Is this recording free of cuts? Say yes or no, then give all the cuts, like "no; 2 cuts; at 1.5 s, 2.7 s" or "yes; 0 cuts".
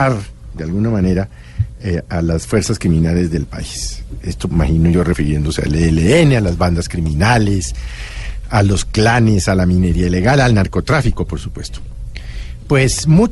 no; 1 cut; at 4.5 s